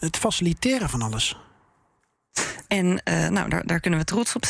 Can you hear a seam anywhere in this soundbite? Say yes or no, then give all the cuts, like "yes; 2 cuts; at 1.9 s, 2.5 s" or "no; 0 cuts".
yes; 1 cut; at 2.6 s